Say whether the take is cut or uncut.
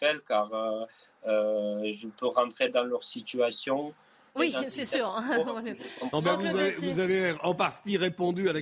cut